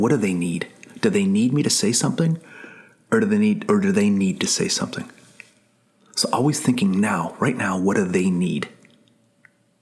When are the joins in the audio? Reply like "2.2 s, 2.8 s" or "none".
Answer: none